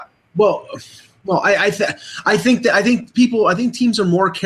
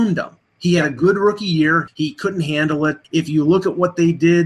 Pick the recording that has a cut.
second; 2 cuts; at 1.9 s, 3.0 s

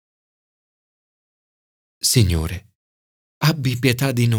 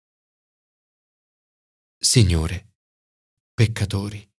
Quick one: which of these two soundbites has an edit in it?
second; 1 cut; at 3.4 s

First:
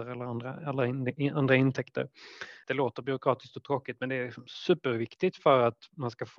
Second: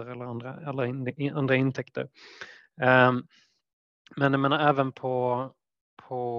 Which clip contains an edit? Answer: first; 1 cut; at 2.6 s

